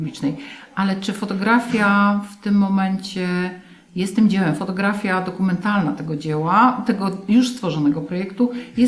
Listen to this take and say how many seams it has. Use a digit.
0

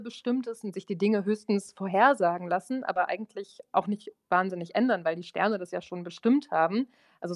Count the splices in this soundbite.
0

